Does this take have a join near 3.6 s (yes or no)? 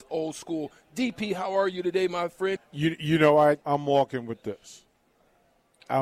yes